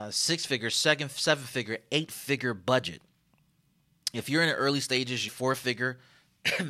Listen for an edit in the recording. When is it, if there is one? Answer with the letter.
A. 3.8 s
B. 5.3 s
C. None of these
B